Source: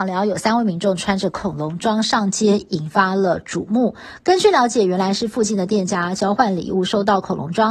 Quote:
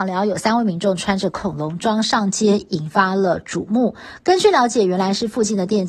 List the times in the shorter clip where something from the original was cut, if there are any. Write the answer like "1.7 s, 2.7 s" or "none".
none